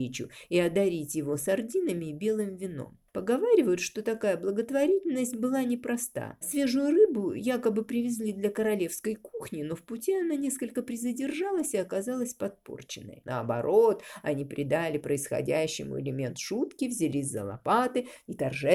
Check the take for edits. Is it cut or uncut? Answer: cut